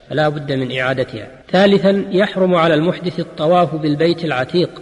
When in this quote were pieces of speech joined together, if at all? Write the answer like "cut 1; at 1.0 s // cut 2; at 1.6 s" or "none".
cut 1; at 1.4 s